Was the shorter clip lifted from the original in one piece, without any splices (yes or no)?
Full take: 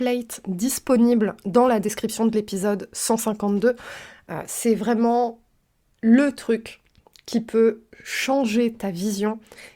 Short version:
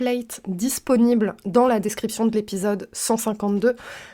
yes